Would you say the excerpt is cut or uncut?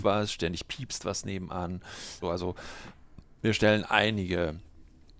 cut